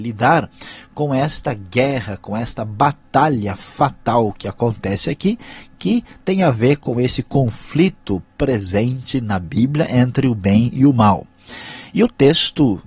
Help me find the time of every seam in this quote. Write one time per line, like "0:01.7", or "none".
none